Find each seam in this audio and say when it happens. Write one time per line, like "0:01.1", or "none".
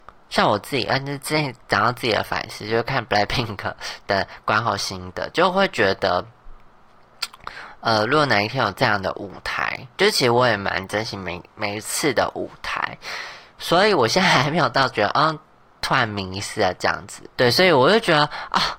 0:17.3